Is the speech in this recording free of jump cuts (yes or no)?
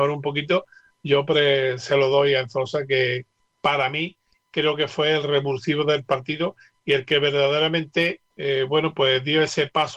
no